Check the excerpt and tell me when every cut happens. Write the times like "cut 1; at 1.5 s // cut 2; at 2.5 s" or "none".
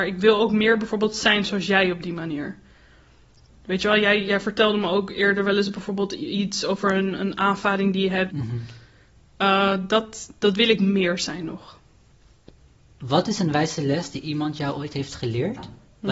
cut 1; at 8.3 s